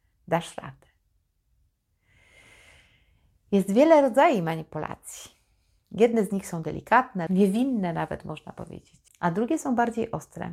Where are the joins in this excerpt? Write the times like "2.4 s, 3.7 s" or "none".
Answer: 7.3 s, 9.1 s